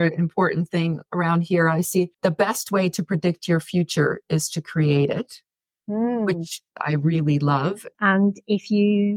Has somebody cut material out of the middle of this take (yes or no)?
yes